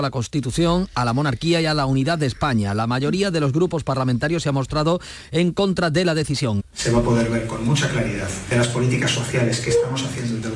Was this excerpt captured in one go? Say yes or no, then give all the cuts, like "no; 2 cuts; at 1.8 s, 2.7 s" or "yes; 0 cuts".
no; 1 cut; at 6.6 s